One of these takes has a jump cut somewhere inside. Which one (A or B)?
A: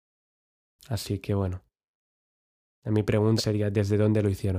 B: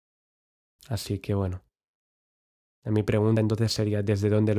A